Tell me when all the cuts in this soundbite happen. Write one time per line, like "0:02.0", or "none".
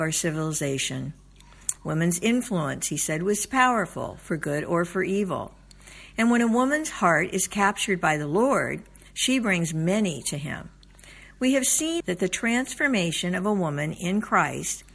0:01.8
0:12.0